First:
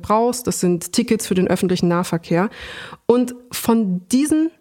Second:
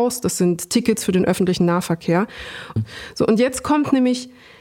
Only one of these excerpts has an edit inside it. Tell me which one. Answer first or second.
second